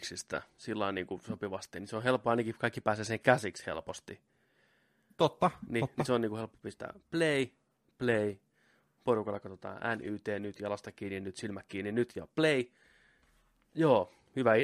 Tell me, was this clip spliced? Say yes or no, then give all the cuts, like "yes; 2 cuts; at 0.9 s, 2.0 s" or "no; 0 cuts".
no; 0 cuts